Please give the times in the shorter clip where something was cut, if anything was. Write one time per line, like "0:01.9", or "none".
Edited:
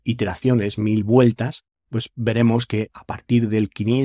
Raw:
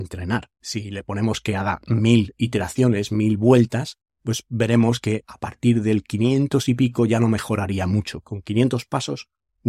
none